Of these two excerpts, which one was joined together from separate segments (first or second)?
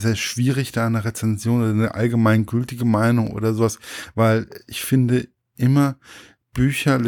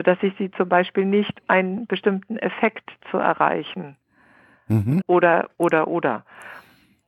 second